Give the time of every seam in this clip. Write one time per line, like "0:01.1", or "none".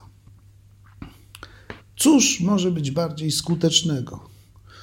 0:01.8